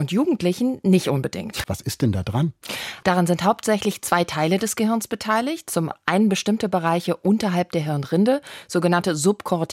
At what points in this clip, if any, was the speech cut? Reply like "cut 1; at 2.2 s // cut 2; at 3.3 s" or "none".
cut 1; at 1.6 s // cut 2; at 3.0 s